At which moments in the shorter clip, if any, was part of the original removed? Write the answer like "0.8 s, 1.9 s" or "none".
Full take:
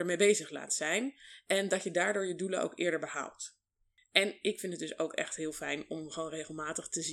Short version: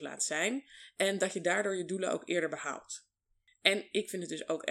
none